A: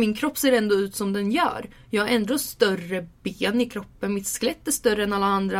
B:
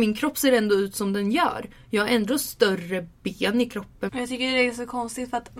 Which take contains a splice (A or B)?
B